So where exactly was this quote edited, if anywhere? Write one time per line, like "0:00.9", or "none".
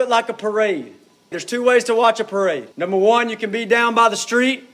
0:01.3
0:02.7